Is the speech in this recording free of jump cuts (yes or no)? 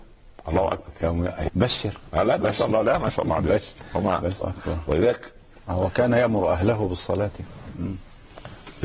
no